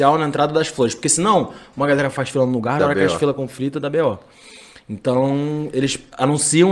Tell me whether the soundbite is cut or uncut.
cut